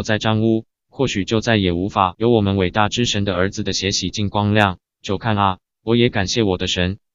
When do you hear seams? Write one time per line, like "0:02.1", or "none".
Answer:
0:04.9